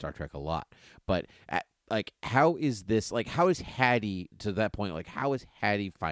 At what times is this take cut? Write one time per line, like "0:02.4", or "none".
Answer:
0:04.3